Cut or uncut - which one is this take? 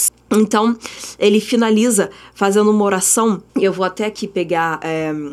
cut